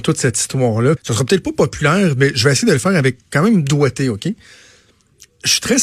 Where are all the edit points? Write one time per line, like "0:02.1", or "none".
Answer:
0:01.0